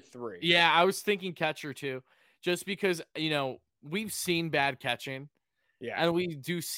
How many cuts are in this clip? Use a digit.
0